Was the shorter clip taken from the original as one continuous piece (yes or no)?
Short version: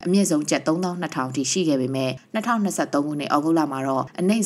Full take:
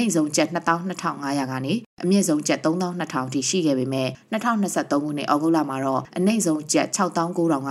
yes